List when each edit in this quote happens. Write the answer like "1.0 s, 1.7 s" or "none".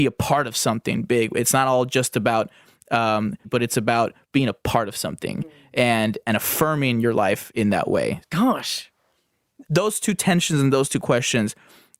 3.4 s, 8.2 s, 9.6 s